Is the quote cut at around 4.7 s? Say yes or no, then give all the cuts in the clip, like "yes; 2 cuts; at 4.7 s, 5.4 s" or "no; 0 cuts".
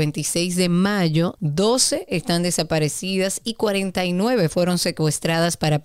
no; 1 cut; at 1.4 s